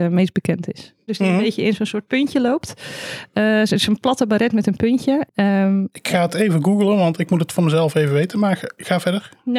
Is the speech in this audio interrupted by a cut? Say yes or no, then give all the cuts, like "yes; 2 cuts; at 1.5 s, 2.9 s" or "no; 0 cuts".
yes; 2 cuts; at 1.1 s, 5.3 s